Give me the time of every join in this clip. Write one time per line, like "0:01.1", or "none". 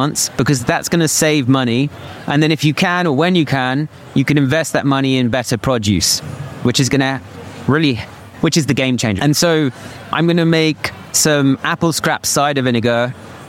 0:09.2